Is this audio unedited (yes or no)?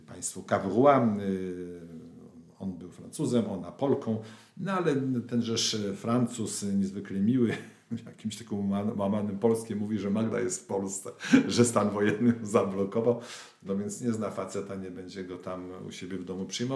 yes